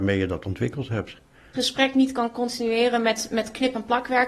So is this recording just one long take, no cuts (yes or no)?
no